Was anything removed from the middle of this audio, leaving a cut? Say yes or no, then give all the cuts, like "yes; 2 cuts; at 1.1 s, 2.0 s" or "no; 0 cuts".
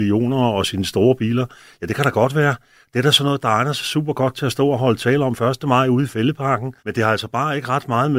yes; 1 cut; at 6.8 s